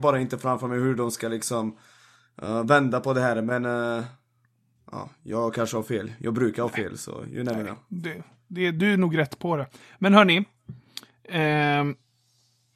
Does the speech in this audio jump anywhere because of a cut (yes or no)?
no